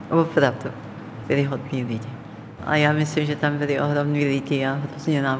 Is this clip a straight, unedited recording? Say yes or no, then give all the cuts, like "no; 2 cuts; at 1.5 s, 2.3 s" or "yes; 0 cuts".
no; 2 cuts; at 1.2 s, 2.6 s